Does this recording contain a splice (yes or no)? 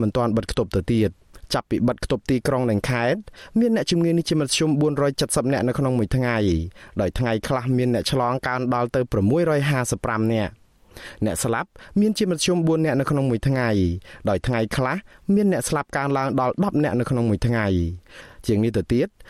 no